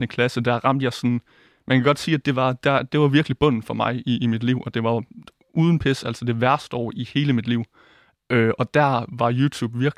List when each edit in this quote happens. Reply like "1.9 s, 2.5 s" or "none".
none

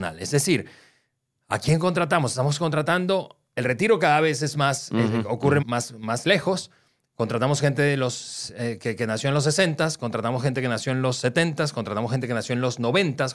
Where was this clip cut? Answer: 5.6 s

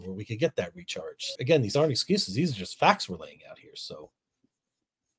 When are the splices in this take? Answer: 1.4 s

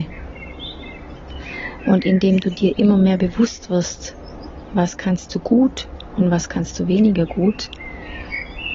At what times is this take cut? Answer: none

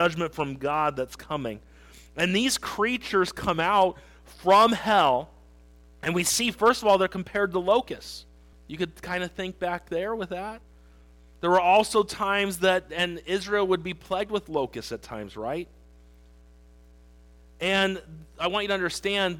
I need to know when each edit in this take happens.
8.5 s

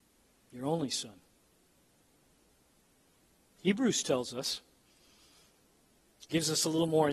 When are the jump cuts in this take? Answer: none

